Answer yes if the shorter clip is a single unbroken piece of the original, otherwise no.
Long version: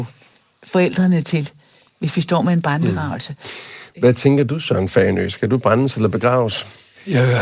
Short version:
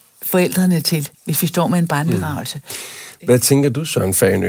no